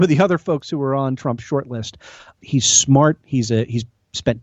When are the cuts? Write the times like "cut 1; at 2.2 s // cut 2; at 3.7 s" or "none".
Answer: none